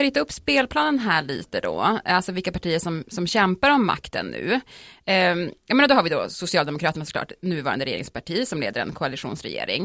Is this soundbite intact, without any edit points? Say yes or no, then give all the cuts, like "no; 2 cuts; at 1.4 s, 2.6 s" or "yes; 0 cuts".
yes; 0 cuts